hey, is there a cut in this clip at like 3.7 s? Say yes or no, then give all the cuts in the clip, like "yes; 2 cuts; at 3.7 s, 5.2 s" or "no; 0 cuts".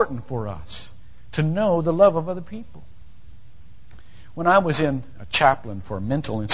no; 1 cut; at 5.2 s